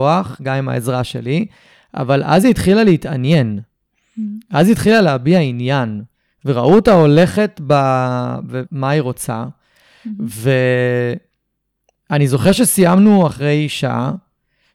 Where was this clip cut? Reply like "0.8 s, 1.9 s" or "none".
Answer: 8.7 s